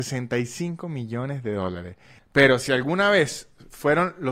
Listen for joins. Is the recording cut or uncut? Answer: cut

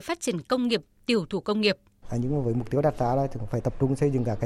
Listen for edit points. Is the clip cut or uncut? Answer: cut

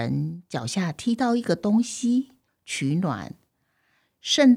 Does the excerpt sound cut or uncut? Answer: cut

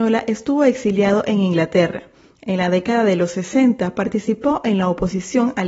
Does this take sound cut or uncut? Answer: uncut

